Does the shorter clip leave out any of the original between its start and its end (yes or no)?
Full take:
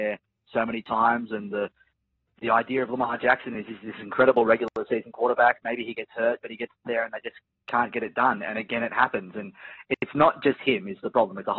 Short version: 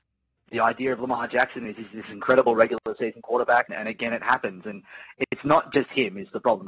yes